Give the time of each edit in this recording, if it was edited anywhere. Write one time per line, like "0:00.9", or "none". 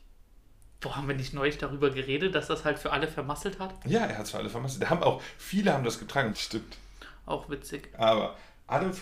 0:06.3
0:07.9